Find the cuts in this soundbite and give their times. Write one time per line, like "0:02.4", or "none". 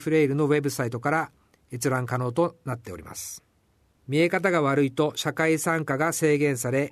0:04.0